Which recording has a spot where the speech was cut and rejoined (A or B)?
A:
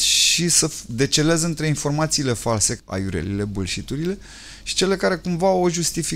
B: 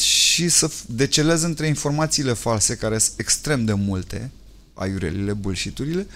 A